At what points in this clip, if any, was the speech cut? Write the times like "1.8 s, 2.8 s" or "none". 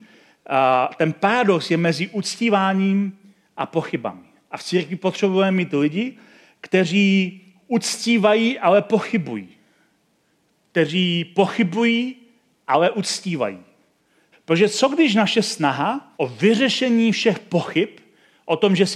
14.3 s, 16.1 s

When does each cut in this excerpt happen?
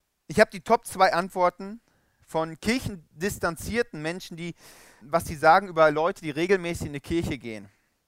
5.0 s

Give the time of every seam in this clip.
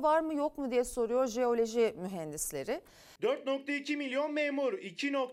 3.2 s

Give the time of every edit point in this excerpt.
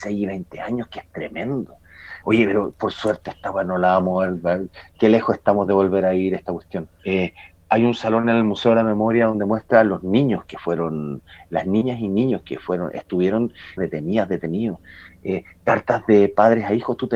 2.2 s, 7.0 s, 13.8 s

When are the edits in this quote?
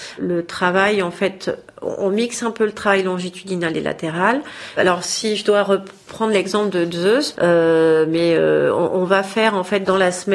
4.7 s, 7.3 s

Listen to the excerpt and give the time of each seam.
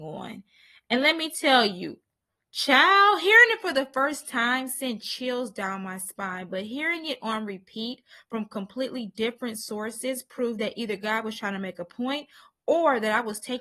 none

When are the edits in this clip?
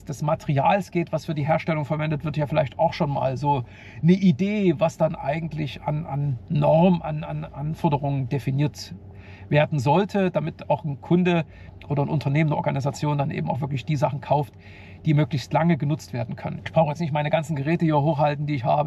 16.6 s

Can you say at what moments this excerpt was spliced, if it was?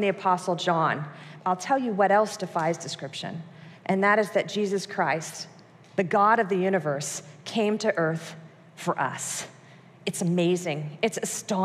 1.4 s

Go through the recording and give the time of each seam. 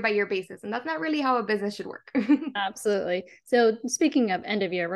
none

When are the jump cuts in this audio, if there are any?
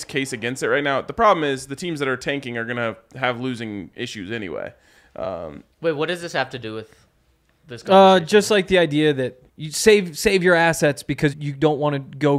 9.5 s, 11.3 s

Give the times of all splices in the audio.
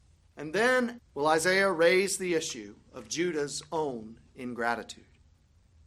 1.0 s

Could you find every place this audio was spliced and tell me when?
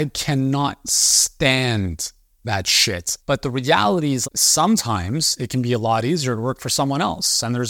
3.2 s, 4.2 s

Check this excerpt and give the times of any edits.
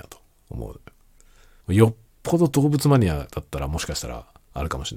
1.6 s

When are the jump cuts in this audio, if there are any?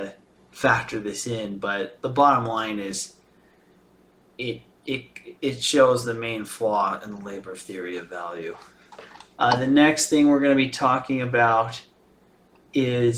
none

